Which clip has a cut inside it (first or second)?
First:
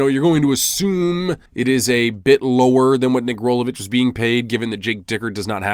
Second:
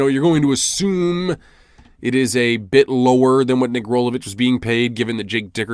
first